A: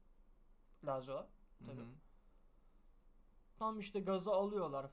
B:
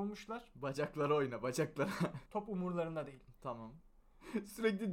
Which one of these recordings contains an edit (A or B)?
B